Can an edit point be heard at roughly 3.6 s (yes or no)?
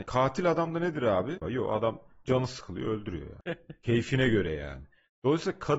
no